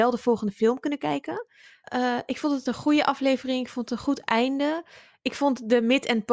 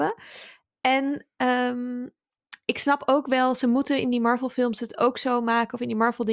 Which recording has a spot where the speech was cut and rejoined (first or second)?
first